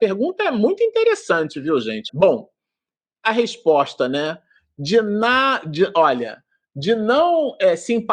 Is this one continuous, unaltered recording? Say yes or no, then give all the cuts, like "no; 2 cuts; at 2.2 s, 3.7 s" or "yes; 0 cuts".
no; 1 cut; at 2.1 s